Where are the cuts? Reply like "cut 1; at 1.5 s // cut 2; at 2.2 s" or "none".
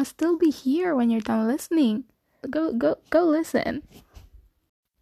cut 1; at 2.4 s